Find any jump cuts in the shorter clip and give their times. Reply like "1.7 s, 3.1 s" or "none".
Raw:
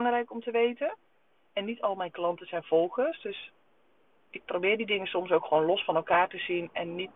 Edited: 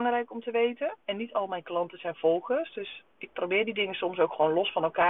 1.0 s, 3.1 s